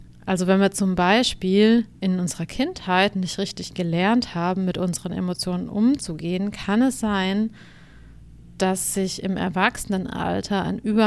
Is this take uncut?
no; 1 cut; at 2.0 s

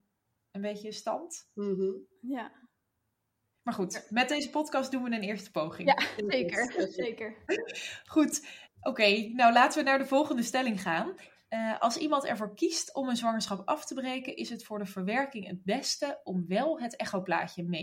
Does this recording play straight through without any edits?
yes; 0 cuts

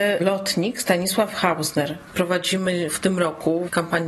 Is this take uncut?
no; 1 cut; at 2.1 s

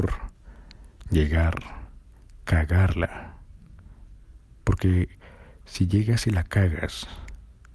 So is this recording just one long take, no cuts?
yes; 0 cuts

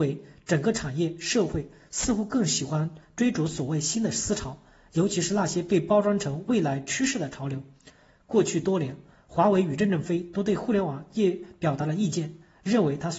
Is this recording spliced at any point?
no; 0 cuts

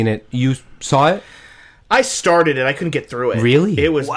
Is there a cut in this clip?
no; 0 cuts

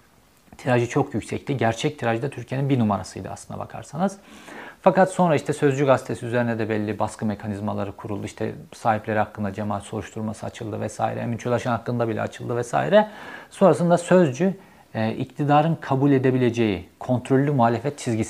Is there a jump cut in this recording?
no; 0 cuts

